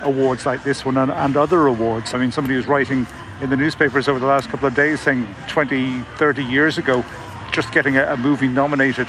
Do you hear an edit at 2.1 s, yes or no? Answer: yes